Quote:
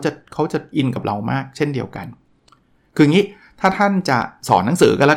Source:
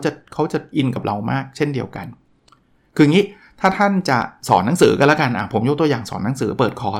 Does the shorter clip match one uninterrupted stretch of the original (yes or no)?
yes